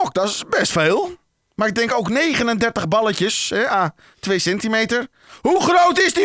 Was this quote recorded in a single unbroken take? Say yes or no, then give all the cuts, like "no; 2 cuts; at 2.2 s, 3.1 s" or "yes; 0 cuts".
yes; 0 cuts